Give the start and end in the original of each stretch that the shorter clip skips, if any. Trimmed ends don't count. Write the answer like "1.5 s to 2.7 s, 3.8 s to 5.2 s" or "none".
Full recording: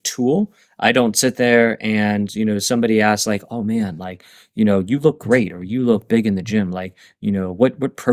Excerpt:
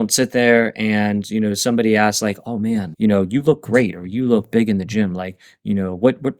4.0 s to 4.5 s